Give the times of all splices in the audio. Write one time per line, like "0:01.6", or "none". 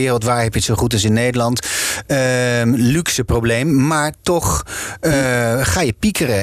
none